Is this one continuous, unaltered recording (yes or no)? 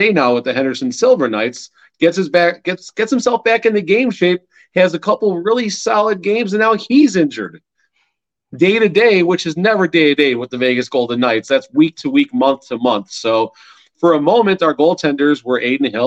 yes